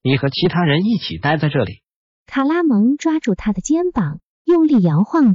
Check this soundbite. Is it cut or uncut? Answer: cut